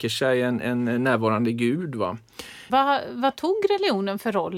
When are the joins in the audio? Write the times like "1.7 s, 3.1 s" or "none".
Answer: 2.7 s